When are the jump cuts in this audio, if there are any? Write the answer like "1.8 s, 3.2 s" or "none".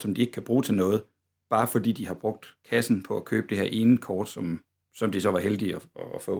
none